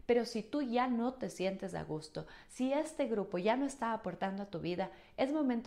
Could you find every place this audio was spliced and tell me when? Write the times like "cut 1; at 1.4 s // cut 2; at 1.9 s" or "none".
none